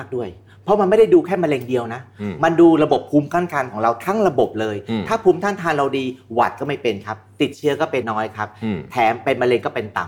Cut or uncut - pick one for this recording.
cut